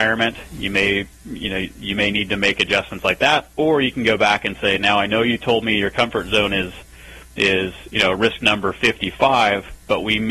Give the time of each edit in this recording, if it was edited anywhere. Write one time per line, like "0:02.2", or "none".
none